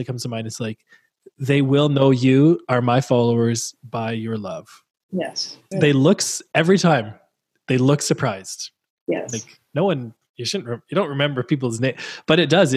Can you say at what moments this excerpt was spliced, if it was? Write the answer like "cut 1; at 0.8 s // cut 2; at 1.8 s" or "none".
cut 1; at 5.7 s